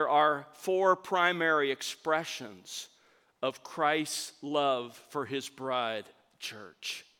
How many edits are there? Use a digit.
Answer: 0